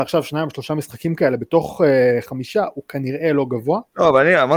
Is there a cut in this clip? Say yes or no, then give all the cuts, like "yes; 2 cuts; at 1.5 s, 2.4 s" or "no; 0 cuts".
no; 0 cuts